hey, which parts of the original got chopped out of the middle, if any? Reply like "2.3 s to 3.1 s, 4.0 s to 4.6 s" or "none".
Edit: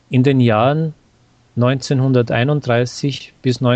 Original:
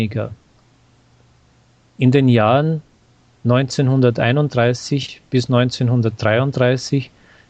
none